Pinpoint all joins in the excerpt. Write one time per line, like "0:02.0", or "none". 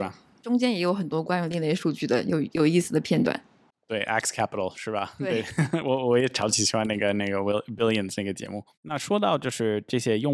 none